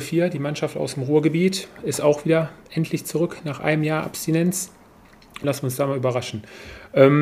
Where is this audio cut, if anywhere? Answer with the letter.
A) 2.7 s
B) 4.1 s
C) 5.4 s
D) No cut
C